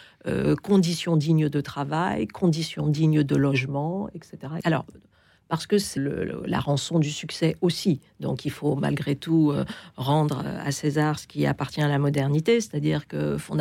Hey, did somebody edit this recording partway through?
yes; 2 cuts; at 4.6 s, 6.0 s

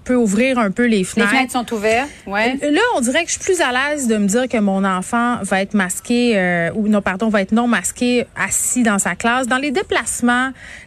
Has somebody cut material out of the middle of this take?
no; 0 cuts

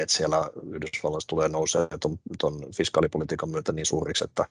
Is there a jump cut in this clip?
no; 0 cuts

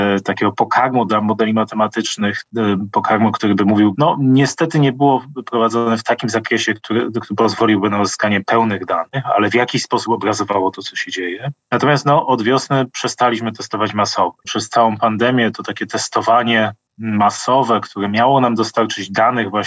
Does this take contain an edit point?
yes; 2 cuts; at 3.9 s, 14.4 s

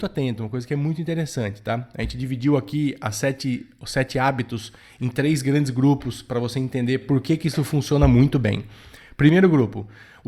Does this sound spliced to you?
no; 0 cuts

